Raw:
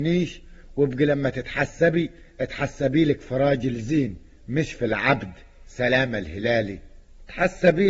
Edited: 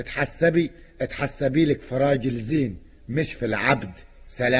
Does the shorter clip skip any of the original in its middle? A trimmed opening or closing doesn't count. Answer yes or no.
no